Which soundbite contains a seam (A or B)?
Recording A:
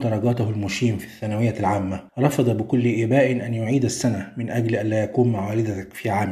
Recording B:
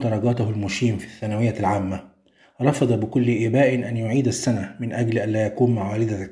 A